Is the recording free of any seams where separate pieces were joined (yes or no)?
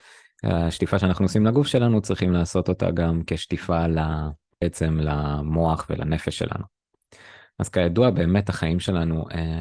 yes